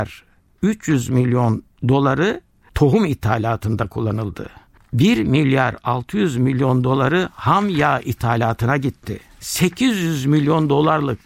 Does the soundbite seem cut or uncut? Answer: uncut